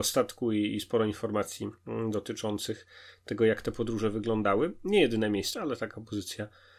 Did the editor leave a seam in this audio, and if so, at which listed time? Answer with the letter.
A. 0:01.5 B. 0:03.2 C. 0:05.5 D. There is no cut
C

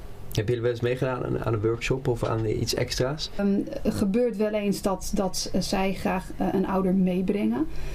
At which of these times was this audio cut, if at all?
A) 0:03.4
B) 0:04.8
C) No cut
A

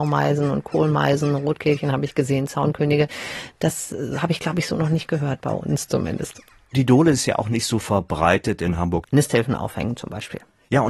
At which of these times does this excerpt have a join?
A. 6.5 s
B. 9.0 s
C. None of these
B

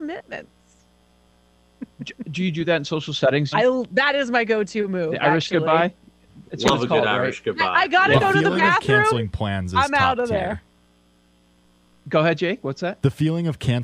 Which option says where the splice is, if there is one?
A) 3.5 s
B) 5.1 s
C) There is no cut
A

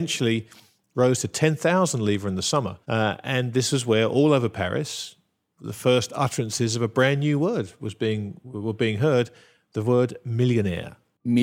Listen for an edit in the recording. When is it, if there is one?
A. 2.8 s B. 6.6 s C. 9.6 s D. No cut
A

